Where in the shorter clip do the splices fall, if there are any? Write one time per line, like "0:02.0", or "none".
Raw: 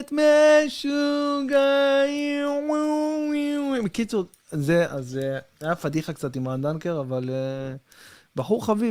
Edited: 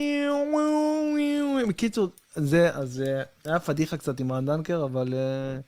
none